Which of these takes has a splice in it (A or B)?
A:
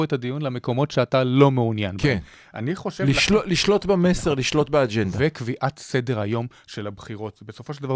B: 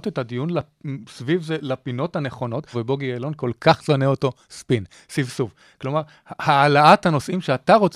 B